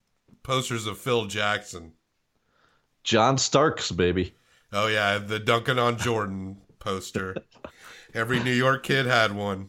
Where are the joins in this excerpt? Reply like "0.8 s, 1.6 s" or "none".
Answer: none